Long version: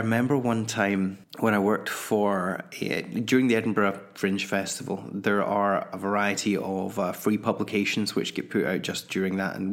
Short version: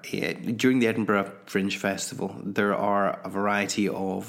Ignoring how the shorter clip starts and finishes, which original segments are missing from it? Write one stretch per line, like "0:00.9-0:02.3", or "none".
none